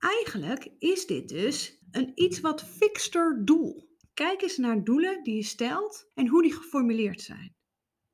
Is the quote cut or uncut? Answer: cut